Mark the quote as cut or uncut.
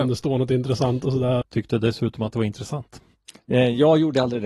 cut